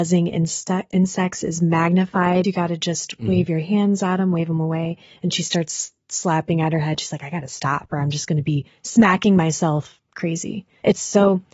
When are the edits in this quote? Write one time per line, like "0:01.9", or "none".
0:02.4